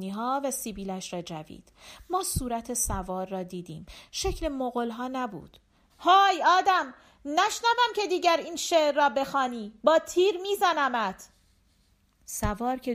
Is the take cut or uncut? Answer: cut